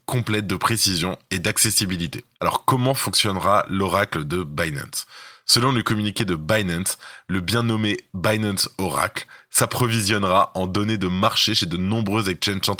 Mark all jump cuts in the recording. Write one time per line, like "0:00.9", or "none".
none